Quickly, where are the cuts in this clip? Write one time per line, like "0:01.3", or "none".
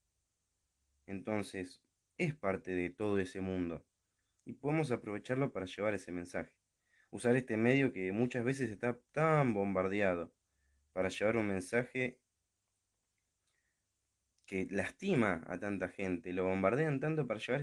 none